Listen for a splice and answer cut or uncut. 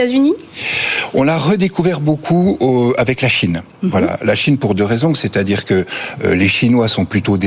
uncut